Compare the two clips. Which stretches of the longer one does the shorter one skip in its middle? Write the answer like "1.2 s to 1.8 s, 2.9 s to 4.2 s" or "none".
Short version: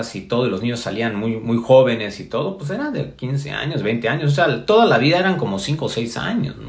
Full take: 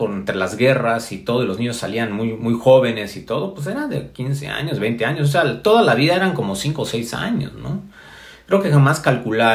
none